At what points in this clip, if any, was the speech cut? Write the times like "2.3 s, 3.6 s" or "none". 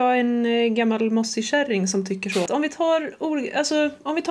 2.5 s